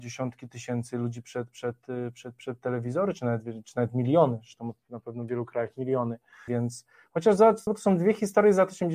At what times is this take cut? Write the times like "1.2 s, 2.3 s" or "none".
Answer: 6.5 s, 7.7 s